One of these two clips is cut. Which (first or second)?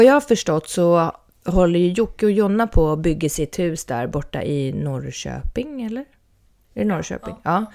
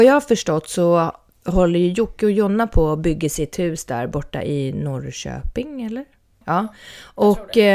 second